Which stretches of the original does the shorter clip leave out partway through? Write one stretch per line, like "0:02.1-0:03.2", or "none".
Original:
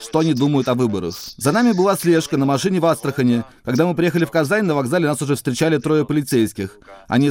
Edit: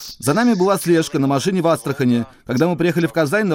none